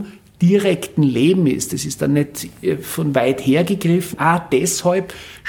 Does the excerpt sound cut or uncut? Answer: cut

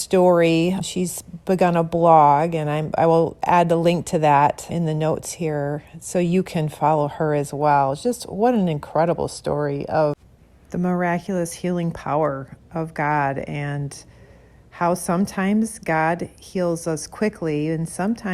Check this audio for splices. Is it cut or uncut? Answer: uncut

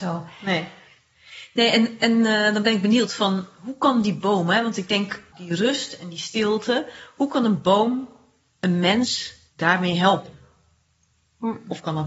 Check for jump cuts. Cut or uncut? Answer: cut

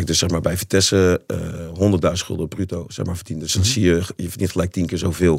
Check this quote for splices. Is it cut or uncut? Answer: uncut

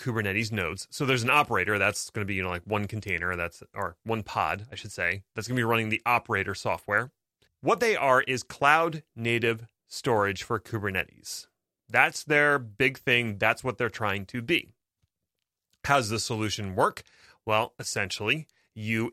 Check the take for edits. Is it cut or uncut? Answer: cut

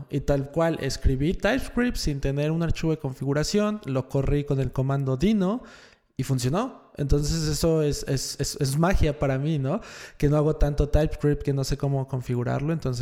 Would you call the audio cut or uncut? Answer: uncut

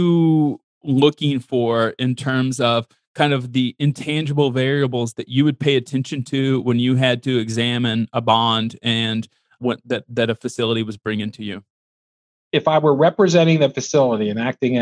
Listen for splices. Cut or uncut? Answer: uncut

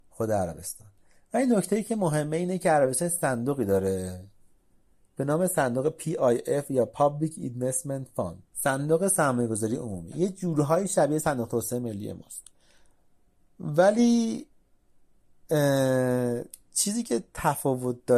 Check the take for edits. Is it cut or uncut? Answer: cut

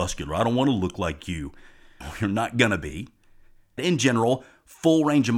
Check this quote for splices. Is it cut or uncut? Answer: cut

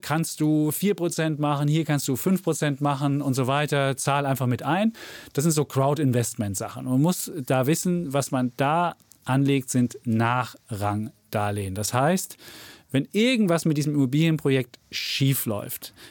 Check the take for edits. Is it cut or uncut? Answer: uncut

